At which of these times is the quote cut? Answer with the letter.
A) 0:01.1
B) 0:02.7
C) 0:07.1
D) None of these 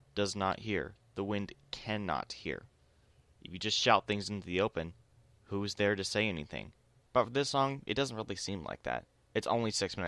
C